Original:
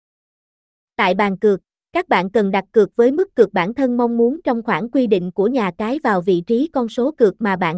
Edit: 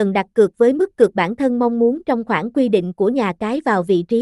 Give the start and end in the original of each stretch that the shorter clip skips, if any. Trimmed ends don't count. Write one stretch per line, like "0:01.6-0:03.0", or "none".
none